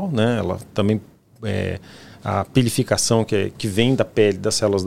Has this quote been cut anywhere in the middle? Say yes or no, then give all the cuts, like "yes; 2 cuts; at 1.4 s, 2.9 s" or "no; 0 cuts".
no; 0 cuts